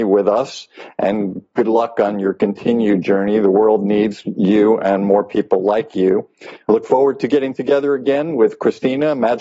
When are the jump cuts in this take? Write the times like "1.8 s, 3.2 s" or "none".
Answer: 6.6 s